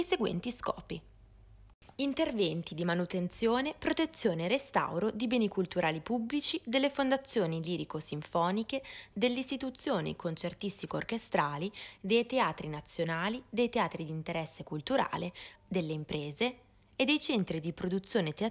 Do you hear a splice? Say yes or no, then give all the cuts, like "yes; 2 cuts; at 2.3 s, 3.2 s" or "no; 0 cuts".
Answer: yes; 2 cuts; at 9.1 s, 15.6 s